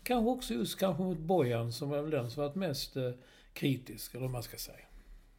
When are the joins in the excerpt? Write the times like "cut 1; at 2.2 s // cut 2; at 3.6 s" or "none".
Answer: none